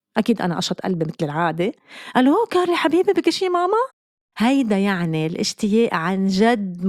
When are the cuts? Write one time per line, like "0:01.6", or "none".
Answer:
0:04.3